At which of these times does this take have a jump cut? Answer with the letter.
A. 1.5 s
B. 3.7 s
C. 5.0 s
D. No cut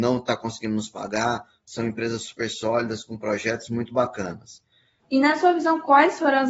C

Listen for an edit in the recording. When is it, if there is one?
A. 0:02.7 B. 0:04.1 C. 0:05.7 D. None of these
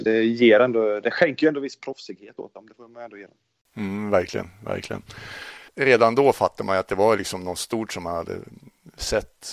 C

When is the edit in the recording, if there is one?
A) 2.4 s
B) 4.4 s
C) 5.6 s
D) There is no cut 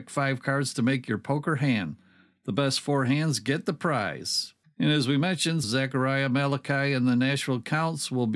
C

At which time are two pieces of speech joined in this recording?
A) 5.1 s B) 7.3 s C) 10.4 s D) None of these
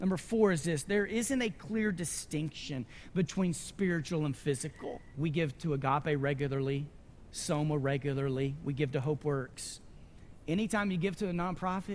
A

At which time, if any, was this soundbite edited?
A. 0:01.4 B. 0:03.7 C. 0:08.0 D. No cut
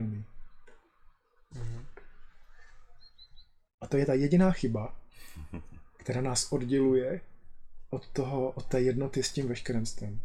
B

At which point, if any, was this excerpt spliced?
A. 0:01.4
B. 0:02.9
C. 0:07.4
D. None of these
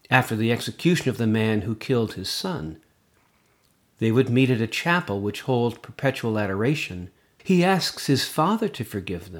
C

